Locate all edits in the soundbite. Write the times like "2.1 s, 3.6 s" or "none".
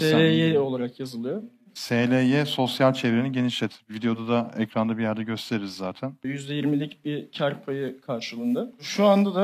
6.2 s